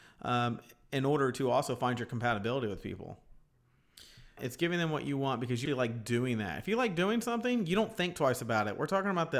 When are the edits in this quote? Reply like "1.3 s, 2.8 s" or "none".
4.4 s, 5.7 s